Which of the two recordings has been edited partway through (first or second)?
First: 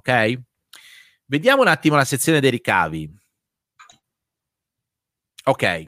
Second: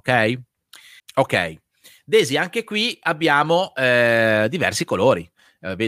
second